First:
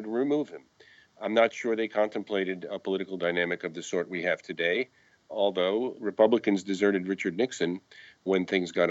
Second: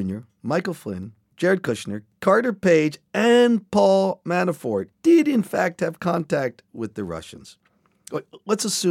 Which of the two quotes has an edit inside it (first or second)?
second